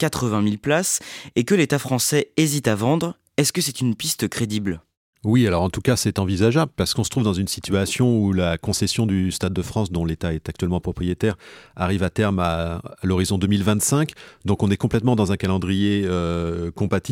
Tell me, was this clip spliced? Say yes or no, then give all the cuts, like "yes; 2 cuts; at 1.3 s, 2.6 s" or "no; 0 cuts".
no; 0 cuts